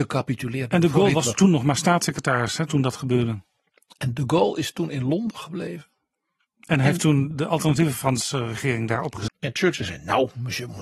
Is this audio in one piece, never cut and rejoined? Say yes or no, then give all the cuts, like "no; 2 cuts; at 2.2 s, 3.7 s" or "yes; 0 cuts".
no; 2 cuts; at 7.3 s, 9.3 s